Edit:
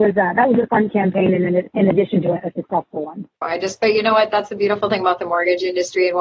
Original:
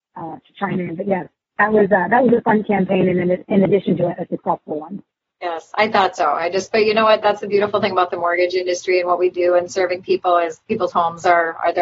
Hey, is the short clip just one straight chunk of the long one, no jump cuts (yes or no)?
no